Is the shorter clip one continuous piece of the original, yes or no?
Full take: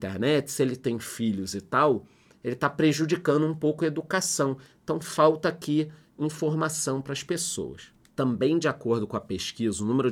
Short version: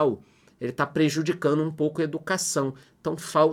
yes